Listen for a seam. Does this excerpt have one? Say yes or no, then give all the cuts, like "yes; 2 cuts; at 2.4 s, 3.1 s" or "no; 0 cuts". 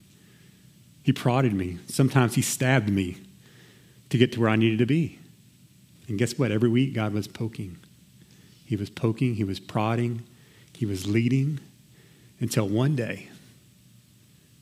yes; 1 cut; at 6.0 s